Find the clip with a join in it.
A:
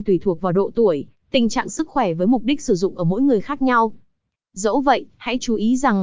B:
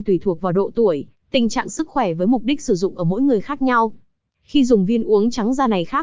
A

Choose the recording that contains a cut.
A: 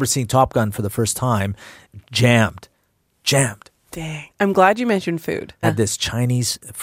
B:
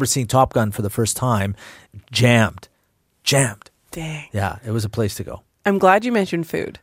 A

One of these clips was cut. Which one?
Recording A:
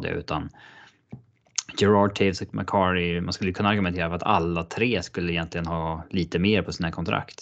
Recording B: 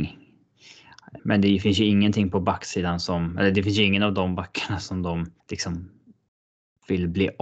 B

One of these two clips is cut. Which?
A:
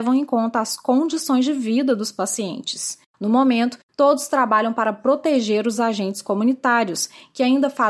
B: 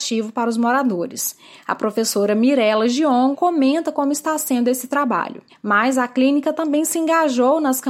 B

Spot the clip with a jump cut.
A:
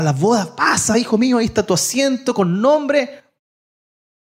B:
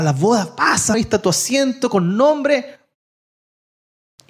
B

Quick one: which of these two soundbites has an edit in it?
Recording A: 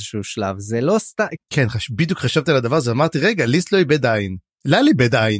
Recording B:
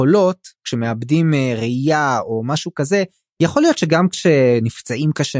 A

